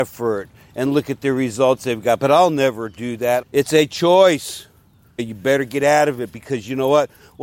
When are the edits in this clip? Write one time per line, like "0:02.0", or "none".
0:03.4
0:05.2